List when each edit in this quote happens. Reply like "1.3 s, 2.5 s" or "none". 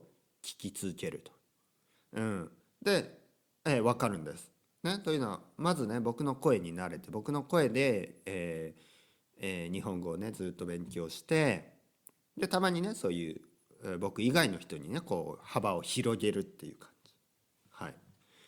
1.9 s